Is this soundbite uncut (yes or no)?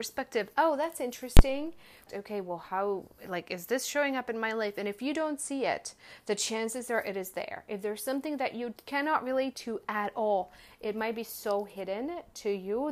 no